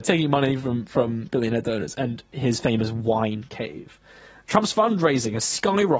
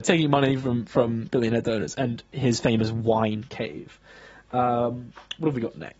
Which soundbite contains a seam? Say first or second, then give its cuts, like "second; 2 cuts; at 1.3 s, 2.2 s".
first; 1 cut; at 4.5 s